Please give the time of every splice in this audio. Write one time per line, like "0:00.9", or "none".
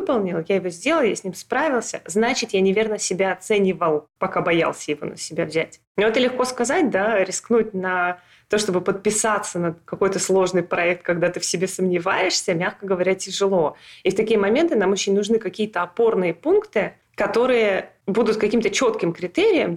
none